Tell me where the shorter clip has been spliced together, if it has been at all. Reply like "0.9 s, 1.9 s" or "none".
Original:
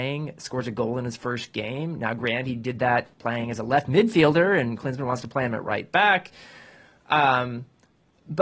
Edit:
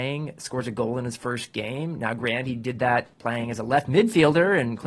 none

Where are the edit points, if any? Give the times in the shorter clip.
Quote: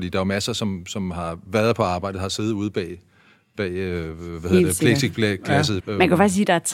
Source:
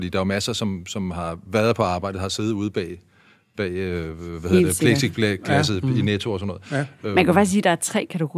5.8 s

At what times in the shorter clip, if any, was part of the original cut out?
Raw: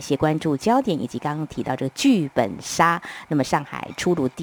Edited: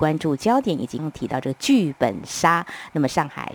1.0 s

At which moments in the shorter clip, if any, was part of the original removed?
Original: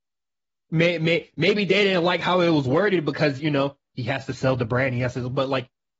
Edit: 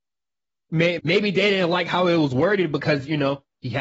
1.0 s

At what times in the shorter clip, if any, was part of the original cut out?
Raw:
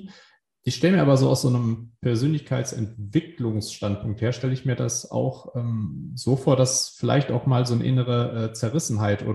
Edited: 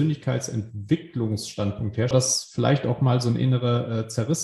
2.1 s

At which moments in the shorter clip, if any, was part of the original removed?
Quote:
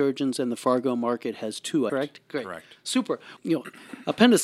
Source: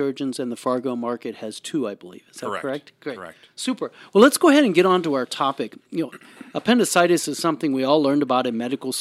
1.9 s, 3.4 s

